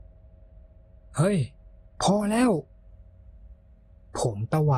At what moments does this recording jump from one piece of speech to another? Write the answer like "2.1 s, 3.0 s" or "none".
none